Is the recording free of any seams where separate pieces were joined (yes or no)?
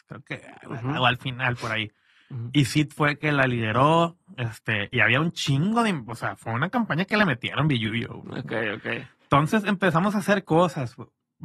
yes